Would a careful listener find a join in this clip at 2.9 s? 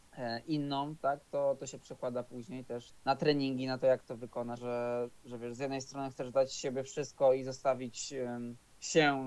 yes; 2 cuts; at 2.9 s, 4.6 s

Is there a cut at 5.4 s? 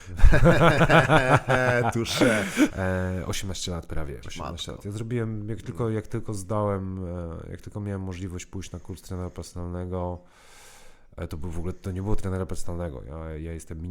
no; 2 cuts; at 2.7 s, 4.2 s

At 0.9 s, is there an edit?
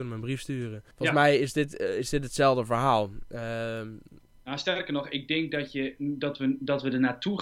yes; 1 cut; at 0.9 s

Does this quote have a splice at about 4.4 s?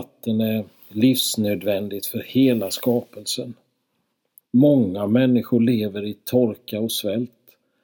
yes; 1 cut; at 4.4 s

